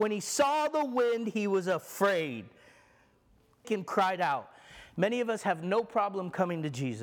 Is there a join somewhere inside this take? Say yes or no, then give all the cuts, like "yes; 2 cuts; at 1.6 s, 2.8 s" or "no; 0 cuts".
yes; 1 cut; at 3.6 s